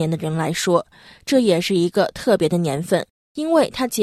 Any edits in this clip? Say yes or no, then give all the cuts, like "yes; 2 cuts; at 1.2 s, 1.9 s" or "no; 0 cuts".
no; 0 cuts